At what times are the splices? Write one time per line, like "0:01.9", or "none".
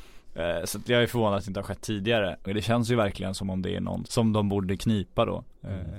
0:02.5
0:04.1